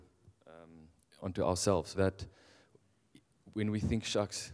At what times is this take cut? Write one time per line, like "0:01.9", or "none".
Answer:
0:01.9